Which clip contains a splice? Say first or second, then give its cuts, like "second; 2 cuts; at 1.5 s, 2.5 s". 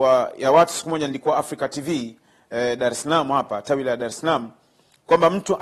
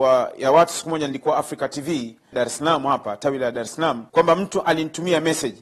second; 2 cuts; at 2.3 s, 4.1 s